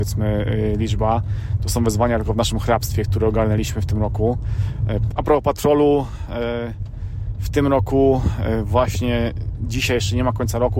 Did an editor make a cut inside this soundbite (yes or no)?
yes